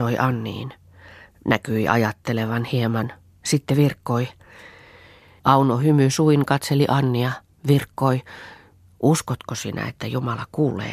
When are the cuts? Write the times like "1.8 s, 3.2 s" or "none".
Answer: 5.4 s